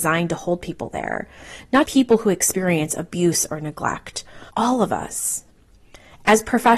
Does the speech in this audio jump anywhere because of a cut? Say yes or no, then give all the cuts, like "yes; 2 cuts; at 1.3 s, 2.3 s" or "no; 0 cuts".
yes; 2 cuts; at 1.8 s, 4.5 s